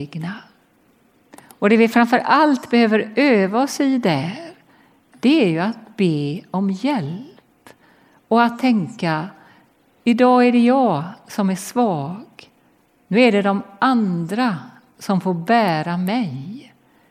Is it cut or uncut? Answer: uncut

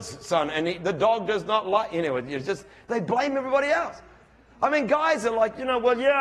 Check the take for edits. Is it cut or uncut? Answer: uncut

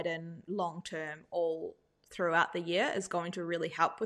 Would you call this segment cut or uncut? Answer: uncut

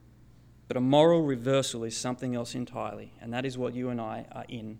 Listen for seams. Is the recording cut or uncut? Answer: uncut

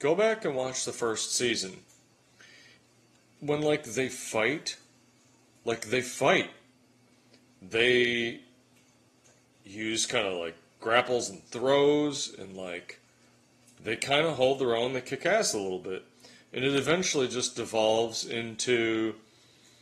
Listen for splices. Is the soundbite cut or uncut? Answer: uncut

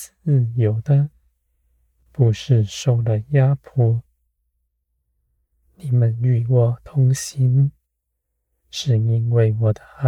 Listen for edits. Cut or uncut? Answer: uncut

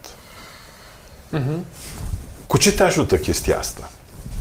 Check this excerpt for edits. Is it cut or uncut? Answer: cut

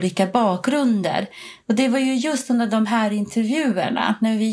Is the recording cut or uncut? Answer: uncut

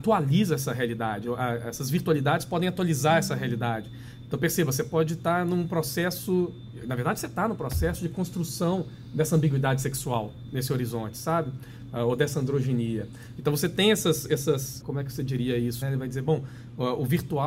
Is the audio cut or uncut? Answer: cut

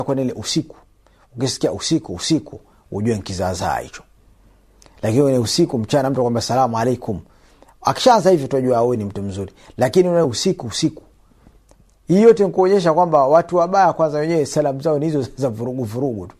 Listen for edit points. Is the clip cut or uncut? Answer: uncut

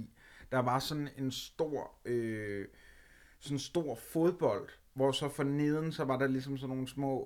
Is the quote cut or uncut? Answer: uncut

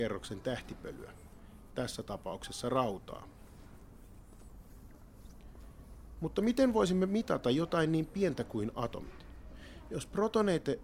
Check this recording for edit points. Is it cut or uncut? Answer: uncut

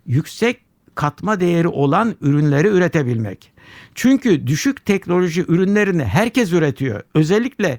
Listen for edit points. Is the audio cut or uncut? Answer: uncut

